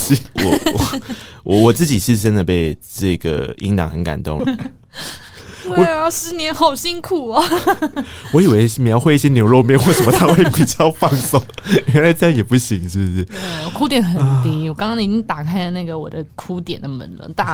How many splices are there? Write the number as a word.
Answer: one